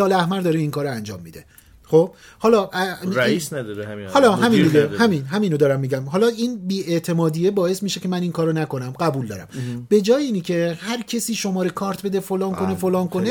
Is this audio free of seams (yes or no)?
yes